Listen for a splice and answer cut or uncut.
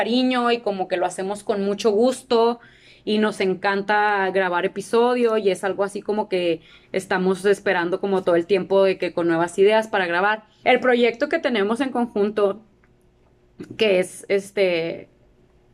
cut